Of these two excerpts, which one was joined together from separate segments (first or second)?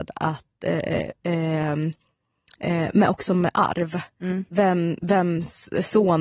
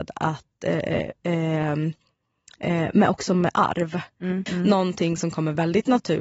second